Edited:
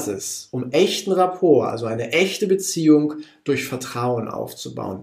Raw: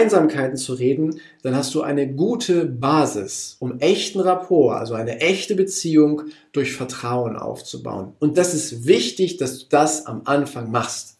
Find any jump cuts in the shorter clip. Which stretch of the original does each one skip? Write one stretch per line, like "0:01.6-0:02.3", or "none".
none